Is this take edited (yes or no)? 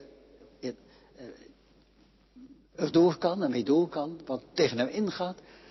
no